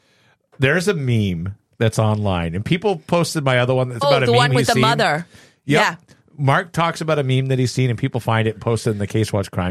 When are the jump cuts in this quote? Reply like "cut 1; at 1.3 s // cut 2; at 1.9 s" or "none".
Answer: cut 1; at 4.0 s

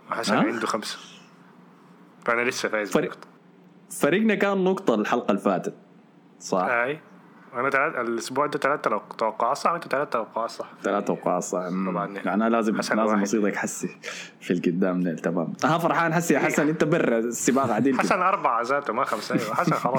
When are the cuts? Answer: none

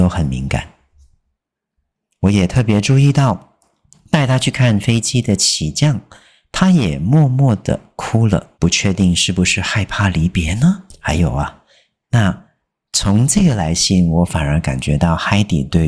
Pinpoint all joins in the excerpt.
cut 1; at 8.5 s // cut 2; at 12.0 s

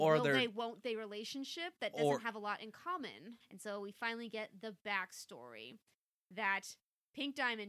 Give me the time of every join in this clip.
cut 1; at 3.4 s

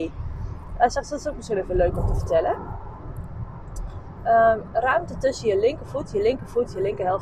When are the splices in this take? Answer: none

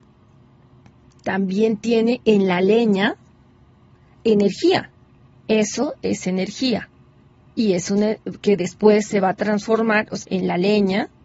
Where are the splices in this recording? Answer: cut 1; at 5.4 s // cut 2; at 10.2 s

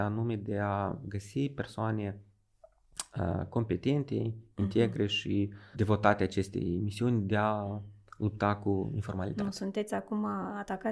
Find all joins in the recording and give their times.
cut 1; at 5.7 s

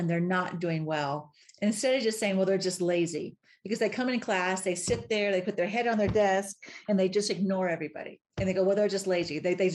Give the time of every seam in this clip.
cut 1; at 8.3 s

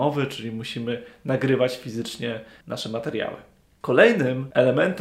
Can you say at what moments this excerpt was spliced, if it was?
none

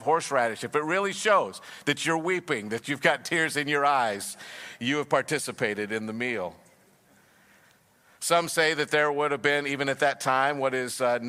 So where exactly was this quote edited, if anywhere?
none

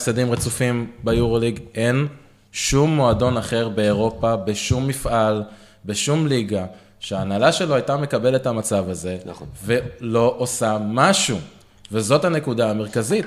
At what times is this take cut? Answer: none

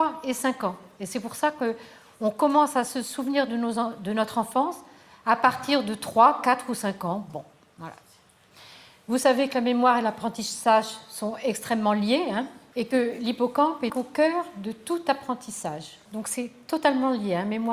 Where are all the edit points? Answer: cut 1; at 13.9 s // cut 2; at 16.1 s

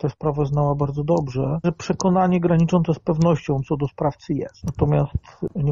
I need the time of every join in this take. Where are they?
cut 1; at 1.6 s

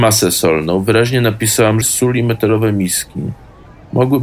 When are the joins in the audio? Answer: cut 1; at 1.8 s

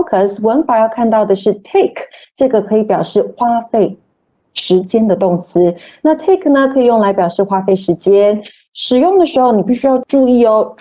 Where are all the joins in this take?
none

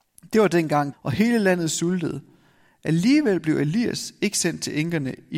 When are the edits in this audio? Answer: cut 1; at 0.9 s

